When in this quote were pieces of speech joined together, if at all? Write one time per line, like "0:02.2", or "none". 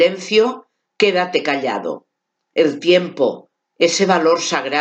0:02.4

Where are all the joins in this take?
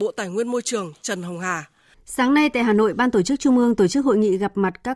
0:01.9

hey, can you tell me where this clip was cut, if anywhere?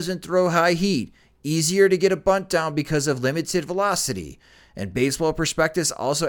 none

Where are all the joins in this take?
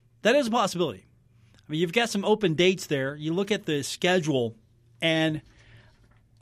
none

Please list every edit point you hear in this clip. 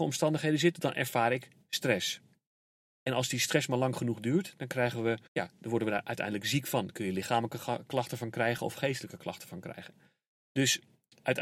0:05.3

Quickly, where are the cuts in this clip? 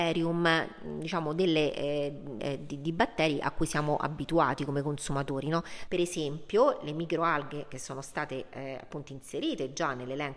0:02.4
0:05.9

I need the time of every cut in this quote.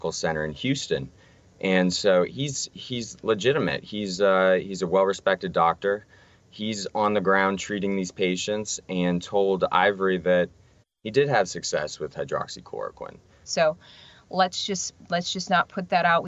0:13.4

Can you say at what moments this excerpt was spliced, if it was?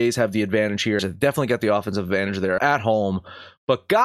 0:01.0
0:02.6

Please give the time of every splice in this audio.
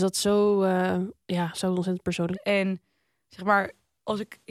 0:01.2
0:02.3

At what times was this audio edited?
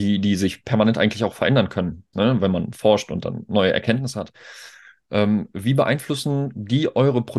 0:02.1

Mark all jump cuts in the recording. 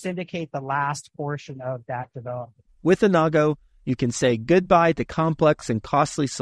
0:02.7

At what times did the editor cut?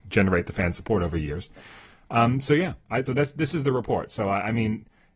0:03.1

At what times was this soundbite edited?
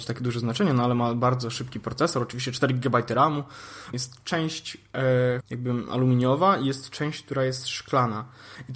0:03.9
0:05.4

